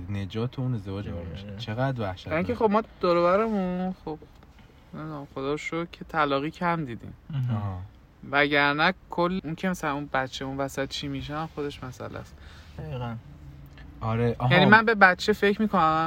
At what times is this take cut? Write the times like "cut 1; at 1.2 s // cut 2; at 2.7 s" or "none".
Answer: cut 1; at 1.0 s // cut 2; at 9.4 s